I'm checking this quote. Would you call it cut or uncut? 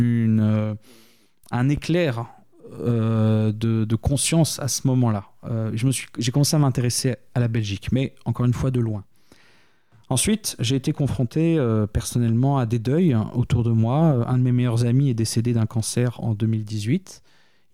uncut